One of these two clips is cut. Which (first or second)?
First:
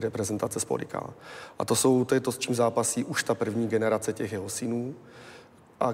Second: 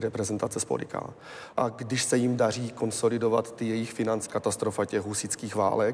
second